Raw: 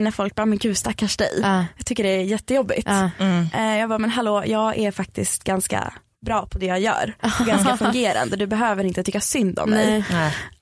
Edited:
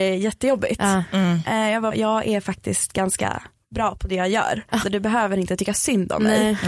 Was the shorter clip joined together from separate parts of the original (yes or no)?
yes